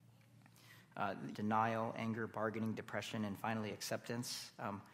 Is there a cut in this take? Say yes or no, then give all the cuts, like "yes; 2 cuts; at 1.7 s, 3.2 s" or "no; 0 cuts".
yes; 1 cut; at 1.3 s